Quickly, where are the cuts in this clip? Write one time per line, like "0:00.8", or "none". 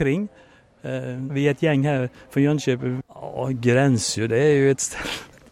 0:01.3
0:03.0